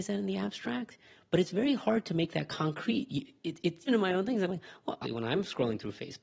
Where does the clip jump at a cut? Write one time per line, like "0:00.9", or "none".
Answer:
0:03.9
0:05.0